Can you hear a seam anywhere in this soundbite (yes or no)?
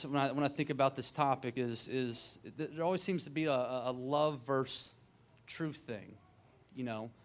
no